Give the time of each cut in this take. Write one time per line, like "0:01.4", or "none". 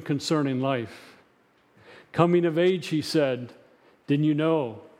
none